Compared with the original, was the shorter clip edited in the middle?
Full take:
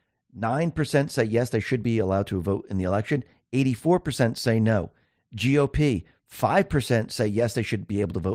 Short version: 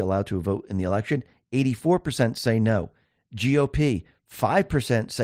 no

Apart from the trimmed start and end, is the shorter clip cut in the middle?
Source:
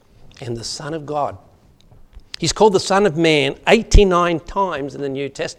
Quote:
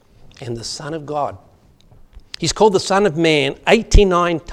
no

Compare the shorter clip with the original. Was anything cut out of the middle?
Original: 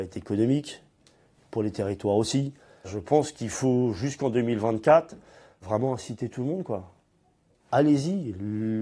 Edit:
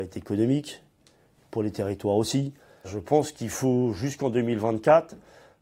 no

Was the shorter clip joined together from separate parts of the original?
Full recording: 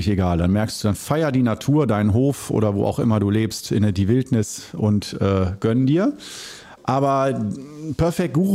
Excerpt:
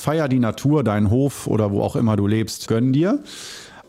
yes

